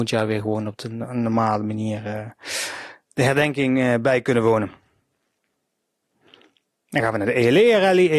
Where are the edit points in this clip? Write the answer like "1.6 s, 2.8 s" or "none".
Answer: none